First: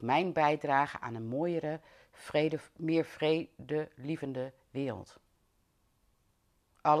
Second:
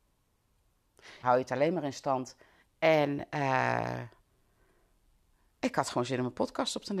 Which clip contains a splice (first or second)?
second